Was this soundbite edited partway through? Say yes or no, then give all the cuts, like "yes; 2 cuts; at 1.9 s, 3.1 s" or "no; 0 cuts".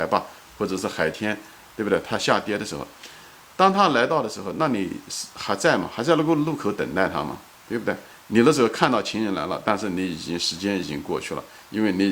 yes; 1 cut; at 8.2 s